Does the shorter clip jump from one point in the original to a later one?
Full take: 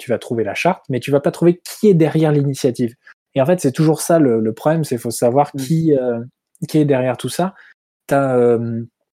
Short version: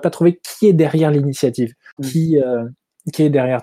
yes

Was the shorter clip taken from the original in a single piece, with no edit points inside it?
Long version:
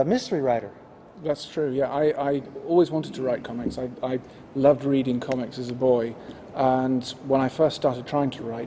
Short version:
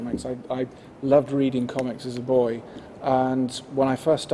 yes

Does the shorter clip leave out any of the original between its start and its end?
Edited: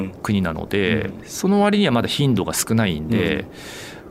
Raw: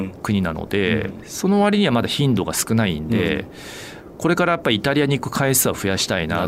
no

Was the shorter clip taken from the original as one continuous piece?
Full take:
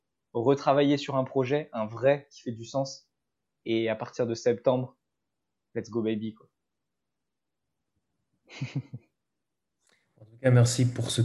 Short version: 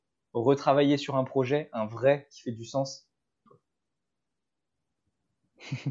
no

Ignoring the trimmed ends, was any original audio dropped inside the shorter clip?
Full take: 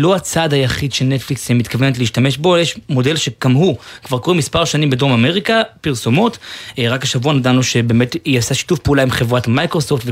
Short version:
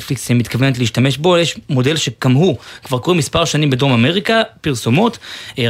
no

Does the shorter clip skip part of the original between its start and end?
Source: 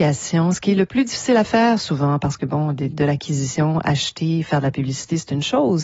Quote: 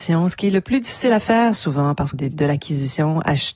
yes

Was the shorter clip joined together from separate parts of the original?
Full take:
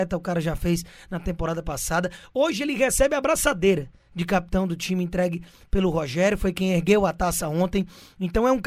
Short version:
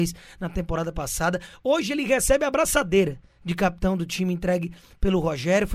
no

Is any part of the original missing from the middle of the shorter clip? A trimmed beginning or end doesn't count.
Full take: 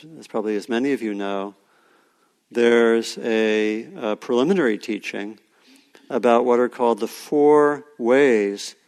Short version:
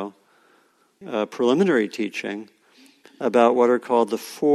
yes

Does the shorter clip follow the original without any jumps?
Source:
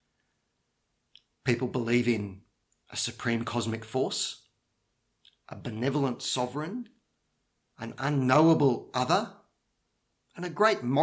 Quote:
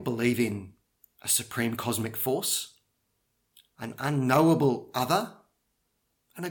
no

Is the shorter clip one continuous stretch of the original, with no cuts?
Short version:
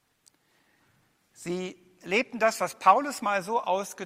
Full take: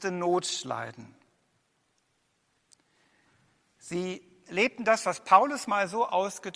yes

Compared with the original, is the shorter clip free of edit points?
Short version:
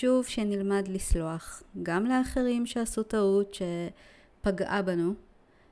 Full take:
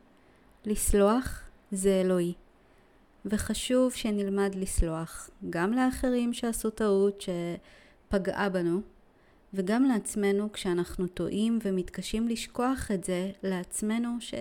yes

